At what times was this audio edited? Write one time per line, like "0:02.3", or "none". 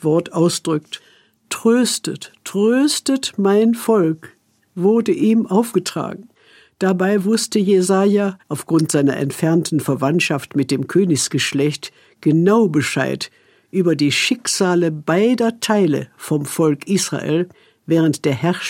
0:08.4